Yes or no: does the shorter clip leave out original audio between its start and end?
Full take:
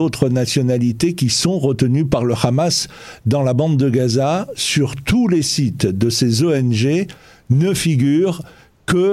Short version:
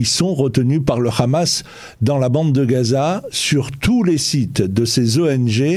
no